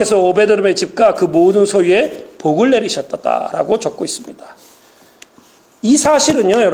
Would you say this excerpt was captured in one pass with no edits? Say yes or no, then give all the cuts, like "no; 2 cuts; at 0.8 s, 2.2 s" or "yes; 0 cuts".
yes; 0 cuts